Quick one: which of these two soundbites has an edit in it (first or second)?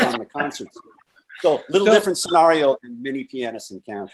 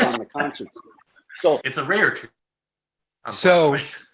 second